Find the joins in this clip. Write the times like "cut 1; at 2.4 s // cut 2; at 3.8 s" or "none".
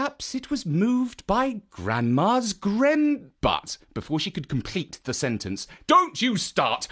cut 1; at 3.3 s // cut 2; at 5.8 s